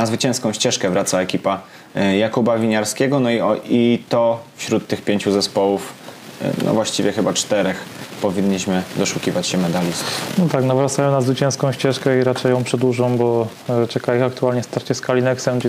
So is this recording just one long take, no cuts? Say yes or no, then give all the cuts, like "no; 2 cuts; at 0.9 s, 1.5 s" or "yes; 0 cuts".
yes; 0 cuts